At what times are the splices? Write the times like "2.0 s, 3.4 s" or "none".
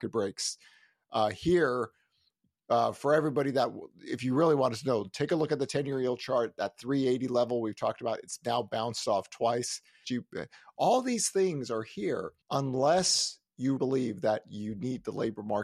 10.0 s, 12.4 s, 13.8 s